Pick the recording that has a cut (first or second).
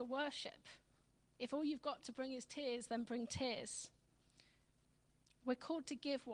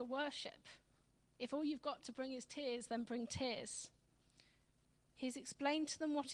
second